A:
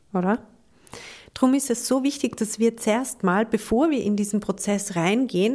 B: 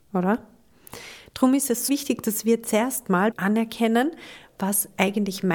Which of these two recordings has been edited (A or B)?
B